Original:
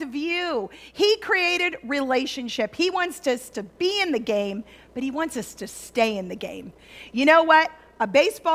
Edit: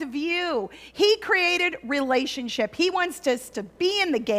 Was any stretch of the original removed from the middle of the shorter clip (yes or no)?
no